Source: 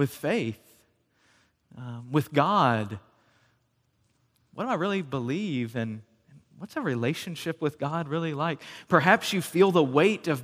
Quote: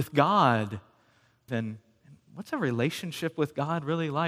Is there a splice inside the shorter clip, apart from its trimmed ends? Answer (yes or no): yes